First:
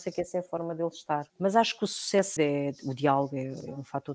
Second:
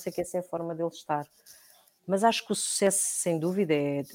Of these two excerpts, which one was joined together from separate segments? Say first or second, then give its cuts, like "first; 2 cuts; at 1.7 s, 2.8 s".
first; 2 cuts; at 1.3 s, 2.4 s